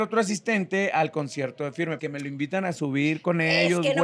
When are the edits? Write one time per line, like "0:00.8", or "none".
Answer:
0:02.0